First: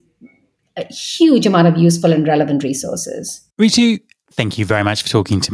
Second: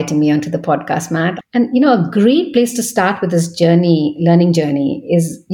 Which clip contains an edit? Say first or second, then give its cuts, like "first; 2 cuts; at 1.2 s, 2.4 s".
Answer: second; 1 cut; at 1.4 s